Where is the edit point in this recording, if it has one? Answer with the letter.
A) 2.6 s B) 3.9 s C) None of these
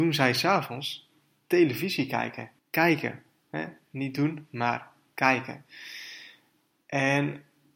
A